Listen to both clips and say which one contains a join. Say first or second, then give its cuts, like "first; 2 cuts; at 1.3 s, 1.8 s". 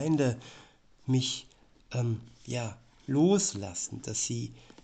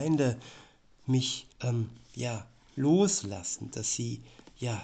second; 1 cut; at 1.5 s